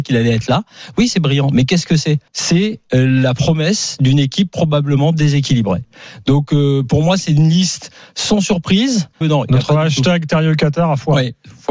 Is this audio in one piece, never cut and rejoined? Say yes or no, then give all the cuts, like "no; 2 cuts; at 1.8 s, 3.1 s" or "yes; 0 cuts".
no; 2 cuts; at 2.3 s, 9.2 s